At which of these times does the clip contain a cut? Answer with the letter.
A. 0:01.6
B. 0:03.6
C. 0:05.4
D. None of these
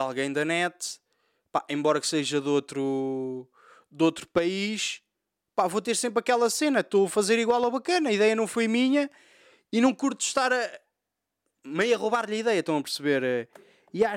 D